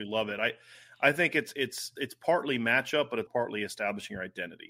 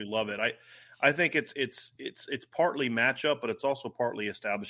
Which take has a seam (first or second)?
first